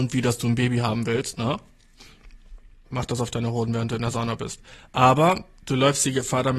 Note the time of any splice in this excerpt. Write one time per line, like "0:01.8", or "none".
0:02.8